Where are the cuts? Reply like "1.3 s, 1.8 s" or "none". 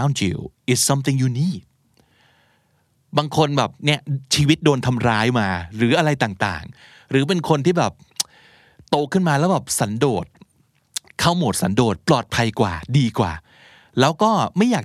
none

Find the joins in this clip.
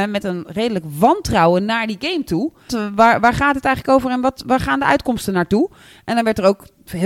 2.7 s

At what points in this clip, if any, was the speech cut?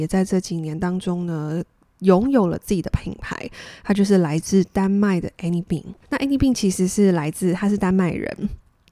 6.0 s

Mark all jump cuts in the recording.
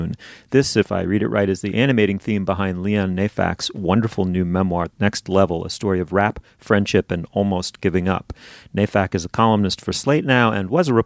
4.9 s

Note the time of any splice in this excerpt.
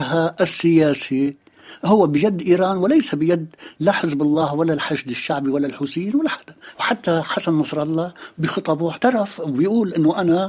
6.7 s

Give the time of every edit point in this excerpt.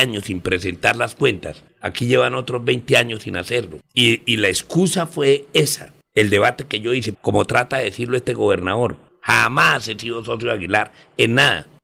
7.1 s

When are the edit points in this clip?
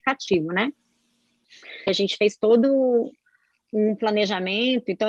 1.9 s

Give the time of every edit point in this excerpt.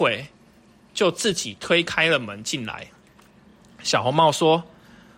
none

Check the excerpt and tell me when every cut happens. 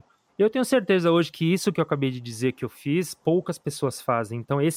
none

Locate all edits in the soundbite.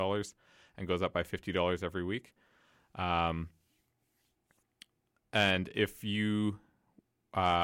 none

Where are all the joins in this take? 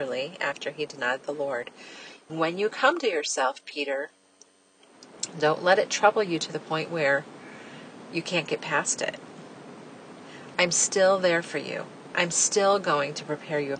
2.3 s

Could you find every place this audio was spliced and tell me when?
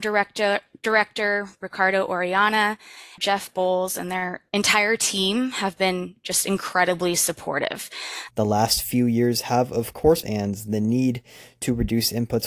3.2 s, 8.3 s, 10.2 s

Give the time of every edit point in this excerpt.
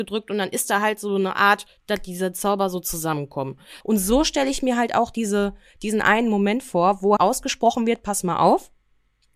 3.8 s, 7.2 s

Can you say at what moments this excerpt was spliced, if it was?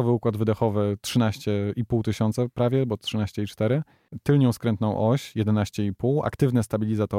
none

